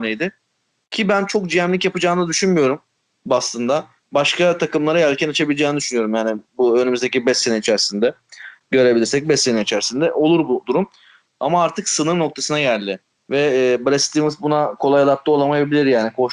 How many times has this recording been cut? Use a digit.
2